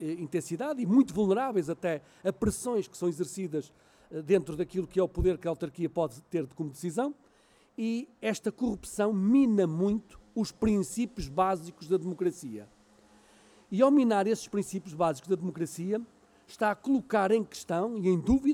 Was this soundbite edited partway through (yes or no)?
no